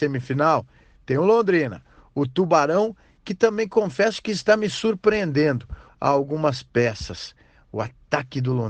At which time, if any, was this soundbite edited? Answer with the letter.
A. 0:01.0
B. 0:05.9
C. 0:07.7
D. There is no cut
B